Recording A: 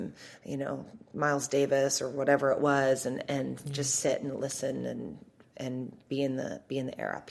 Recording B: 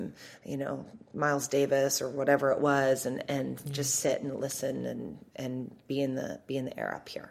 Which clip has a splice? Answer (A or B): B